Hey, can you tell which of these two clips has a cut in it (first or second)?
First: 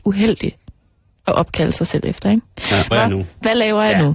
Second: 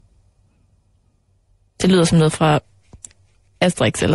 first